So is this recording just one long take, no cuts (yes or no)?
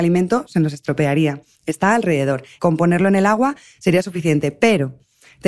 no